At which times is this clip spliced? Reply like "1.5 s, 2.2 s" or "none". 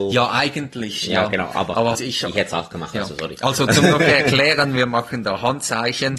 1.9 s